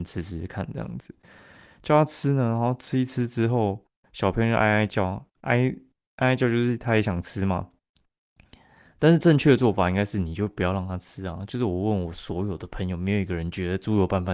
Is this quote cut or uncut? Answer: uncut